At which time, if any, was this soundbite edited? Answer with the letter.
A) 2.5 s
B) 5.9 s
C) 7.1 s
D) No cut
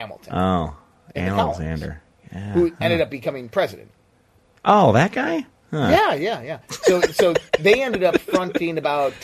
D